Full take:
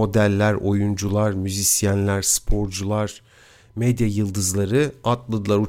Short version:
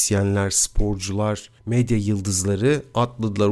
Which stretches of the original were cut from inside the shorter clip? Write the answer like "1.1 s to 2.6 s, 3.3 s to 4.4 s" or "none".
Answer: 3.3 s to 3.7 s